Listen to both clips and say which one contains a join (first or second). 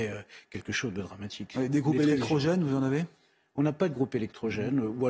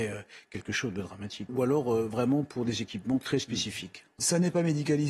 second